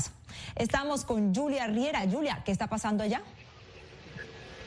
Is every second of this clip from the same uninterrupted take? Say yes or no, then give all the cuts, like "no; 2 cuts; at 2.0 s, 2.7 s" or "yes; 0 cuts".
yes; 0 cuts